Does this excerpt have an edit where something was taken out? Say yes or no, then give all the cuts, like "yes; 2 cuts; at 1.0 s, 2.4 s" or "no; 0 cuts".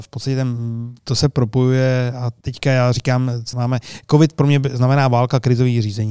yes; 2 cuts; at 2.4 s, 3.5 s